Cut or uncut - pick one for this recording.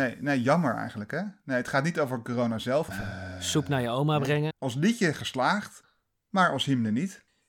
cut